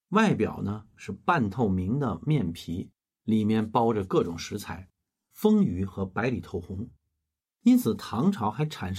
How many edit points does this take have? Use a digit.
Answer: 2